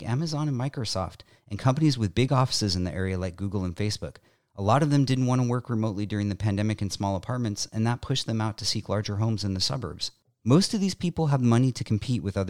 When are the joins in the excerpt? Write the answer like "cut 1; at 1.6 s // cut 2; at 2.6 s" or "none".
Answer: none

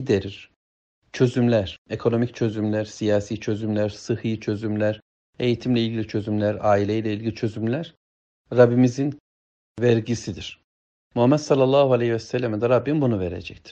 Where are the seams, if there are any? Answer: cut 1; at 3.9 s

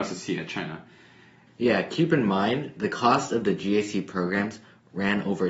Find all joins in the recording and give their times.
cut 1; at 1.5 s

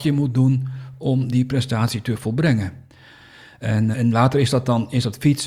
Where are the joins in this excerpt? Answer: cut 1; at 3.9 s

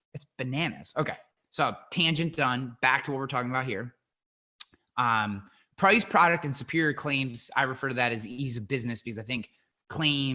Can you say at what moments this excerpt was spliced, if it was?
none

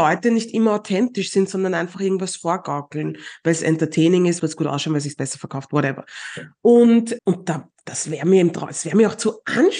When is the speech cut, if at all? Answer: cut 1; at 4.4 s // cut 2; at 7.2 s

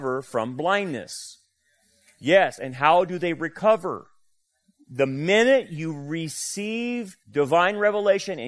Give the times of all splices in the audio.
none

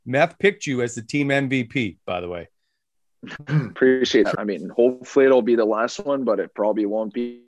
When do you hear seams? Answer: cut 1; at 4.3 s

